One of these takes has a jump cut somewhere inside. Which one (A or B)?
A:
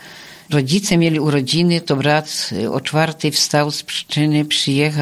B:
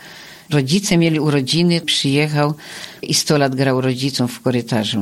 B